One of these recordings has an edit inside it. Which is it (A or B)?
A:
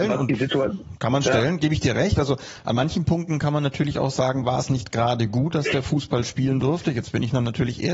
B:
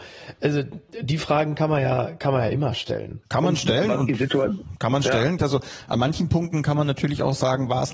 B